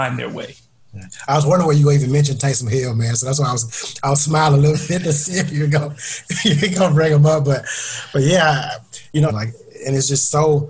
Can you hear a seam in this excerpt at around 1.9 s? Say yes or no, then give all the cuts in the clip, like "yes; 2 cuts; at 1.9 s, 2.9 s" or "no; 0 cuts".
no; 1 cut; at 9.3 s